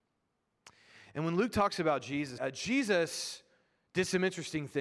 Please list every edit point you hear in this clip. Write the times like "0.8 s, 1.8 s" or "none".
2.4 s